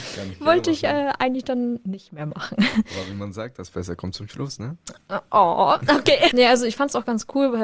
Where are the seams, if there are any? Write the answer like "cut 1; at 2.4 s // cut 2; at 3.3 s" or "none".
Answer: cut 1; at 6.3 s